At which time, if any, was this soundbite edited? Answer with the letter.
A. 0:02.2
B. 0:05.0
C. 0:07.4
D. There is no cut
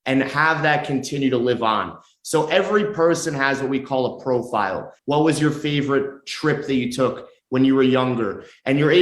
B